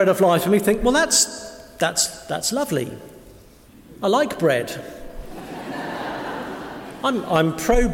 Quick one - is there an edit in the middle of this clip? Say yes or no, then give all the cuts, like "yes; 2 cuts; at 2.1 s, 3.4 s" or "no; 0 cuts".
no; 0 cuts